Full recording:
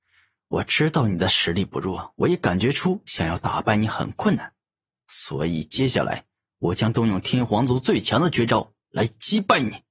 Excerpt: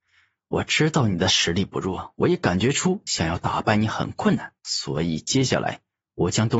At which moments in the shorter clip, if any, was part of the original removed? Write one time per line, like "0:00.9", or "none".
0:04.6

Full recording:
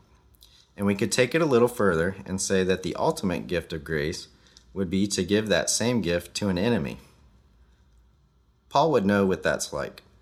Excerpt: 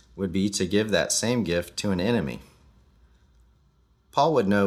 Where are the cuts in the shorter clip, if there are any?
none

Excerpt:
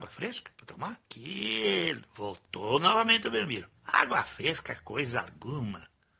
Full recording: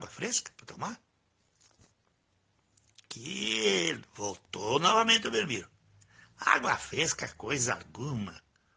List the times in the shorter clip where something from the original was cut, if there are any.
0:01.0
0:03.8

